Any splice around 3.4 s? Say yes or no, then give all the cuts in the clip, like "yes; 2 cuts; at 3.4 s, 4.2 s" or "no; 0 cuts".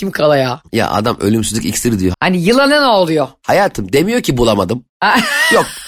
no; 1 cut; at 2.1 s